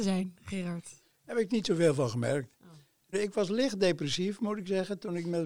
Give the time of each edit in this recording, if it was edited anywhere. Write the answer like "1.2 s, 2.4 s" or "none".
3.1 s

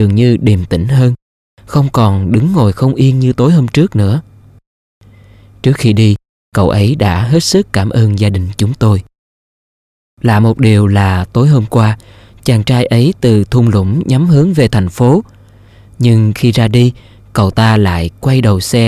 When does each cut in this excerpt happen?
none

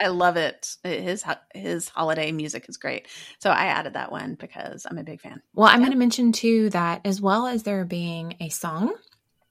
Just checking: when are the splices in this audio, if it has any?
5.5 s

